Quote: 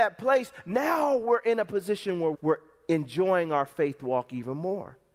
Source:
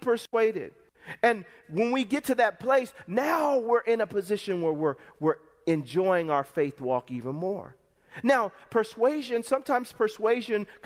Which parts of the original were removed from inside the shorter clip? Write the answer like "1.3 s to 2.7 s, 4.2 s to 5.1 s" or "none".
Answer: 4.8 s to 5.1 s